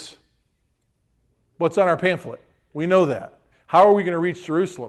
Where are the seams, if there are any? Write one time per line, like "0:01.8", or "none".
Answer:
0:03.5

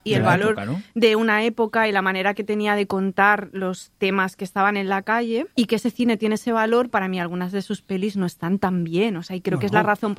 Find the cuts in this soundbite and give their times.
0:05.5
0:06.9

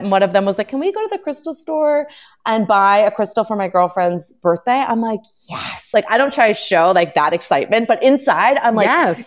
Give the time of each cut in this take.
none

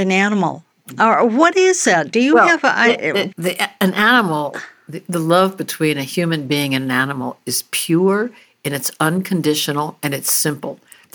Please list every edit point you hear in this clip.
0:03.3

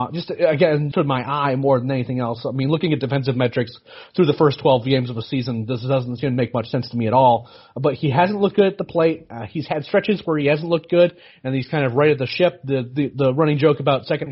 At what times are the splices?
0:00.9

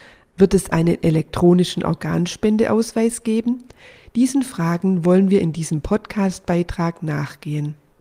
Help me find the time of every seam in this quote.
none

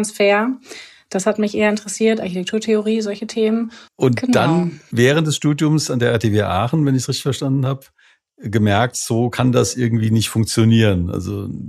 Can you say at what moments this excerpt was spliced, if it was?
0:03.9

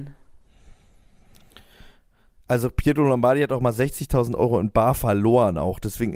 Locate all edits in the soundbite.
none

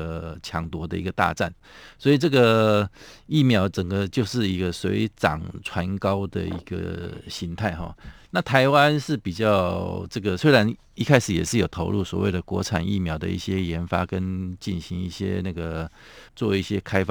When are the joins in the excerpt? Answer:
none

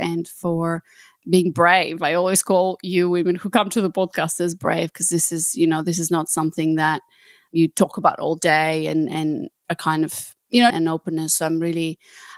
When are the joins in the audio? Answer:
0:10.7

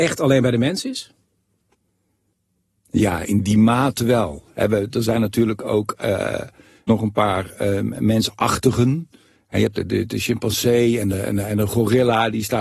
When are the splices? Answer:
none

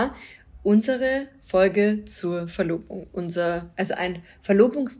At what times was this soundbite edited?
none

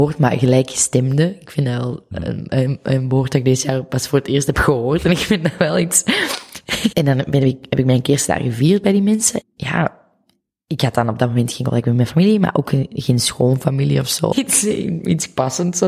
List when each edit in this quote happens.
0:06.9
0:09.4
0:14.3

